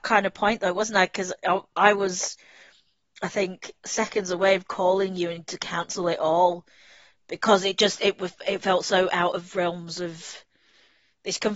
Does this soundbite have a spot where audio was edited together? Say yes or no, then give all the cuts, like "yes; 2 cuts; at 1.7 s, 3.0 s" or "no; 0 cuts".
no; 0 cuts